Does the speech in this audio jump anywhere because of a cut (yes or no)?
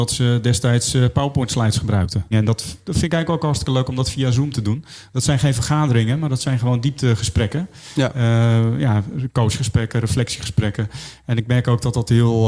yes